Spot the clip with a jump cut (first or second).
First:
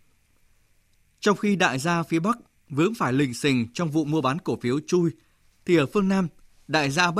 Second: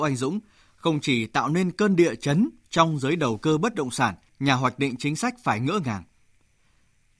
second